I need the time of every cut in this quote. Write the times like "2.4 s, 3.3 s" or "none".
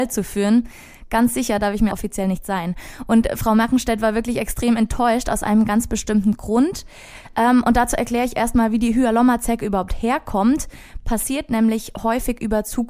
1.9 s